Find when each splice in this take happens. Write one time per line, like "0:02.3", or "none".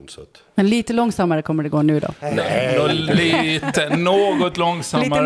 none